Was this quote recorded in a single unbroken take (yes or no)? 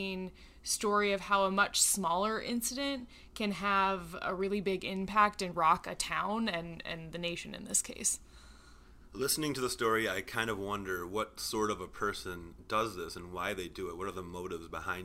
no